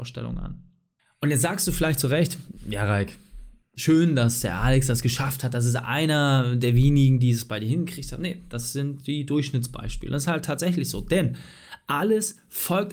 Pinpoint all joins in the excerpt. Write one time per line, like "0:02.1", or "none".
none

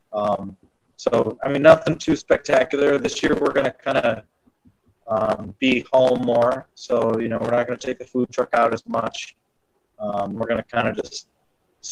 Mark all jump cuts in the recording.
none

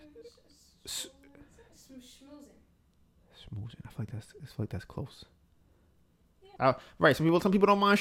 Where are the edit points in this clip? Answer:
0:06.6

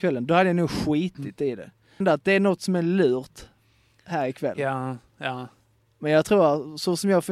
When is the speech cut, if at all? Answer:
0:02.0

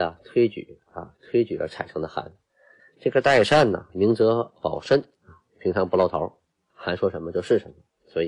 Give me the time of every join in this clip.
0:02.8
0:03.9

